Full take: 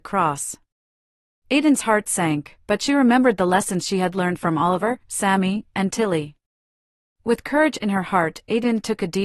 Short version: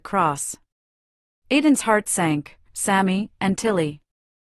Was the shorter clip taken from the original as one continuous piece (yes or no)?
no